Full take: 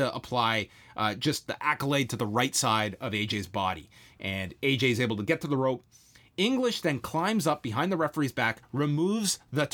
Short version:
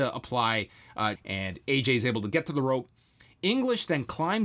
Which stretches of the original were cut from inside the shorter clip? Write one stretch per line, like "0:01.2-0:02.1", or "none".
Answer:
0:01.2-0:04.1